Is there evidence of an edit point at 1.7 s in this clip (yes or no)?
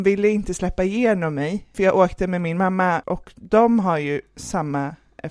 yes